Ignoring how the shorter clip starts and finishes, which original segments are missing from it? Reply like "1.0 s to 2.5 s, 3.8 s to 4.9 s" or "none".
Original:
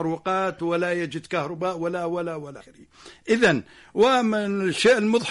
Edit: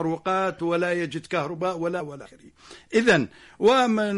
2.0 s to 2.3 s